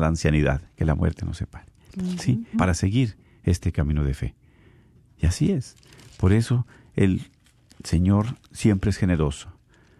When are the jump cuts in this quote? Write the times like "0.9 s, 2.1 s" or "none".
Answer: 2.5 s